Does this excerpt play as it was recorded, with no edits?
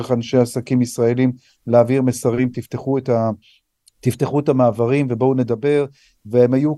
yes; 0 cuts

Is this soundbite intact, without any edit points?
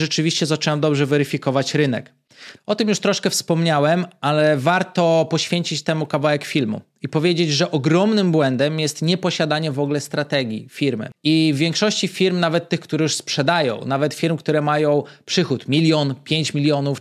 no; 1 cut; at 2.6 s

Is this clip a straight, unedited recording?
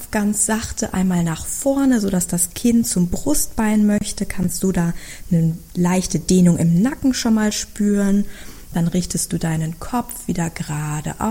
yes; 0 cuts

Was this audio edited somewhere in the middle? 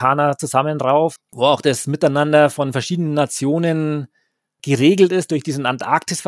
yes; 1 cut; at 1.2 s

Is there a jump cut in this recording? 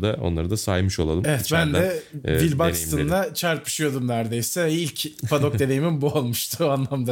no; 0 cuts

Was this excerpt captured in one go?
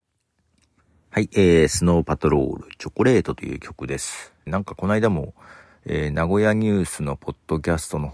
no; 1 cut; at 4.5 s

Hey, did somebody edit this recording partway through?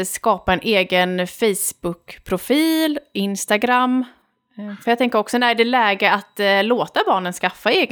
no; 0 cuts

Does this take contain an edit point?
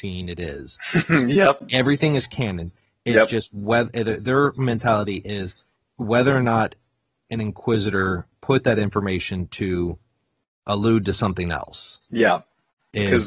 no; 0 cuts

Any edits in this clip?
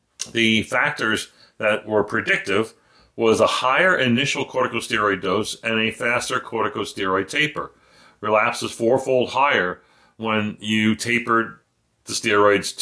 no; 0 cuts

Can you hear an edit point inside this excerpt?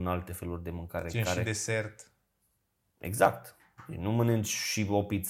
no; 0 cuts

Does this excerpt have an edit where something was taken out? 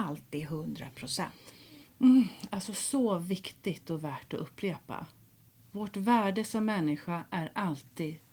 no; 0 cuts

